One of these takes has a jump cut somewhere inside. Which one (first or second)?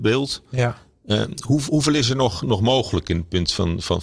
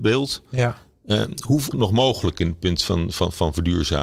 second